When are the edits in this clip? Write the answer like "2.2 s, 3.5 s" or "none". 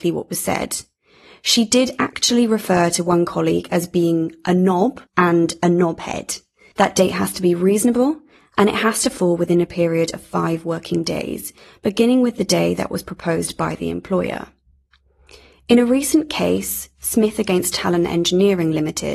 5.1 s, 6.7 s

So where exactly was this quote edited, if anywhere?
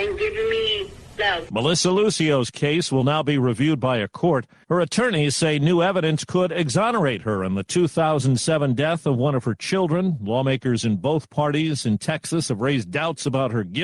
none

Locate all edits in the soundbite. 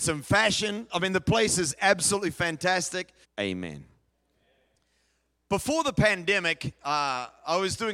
3.2 s

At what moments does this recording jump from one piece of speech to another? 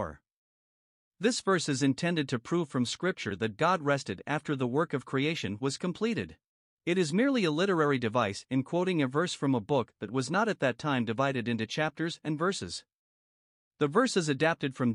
6.7 s

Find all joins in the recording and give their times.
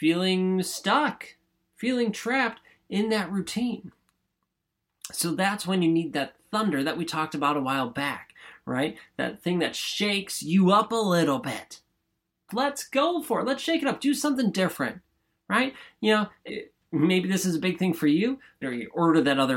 12.5 s, 16.5 s, 18.6 s

